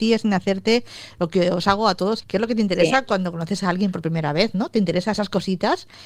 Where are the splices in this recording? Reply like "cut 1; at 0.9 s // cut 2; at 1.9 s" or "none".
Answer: cut 1; at 2.2 s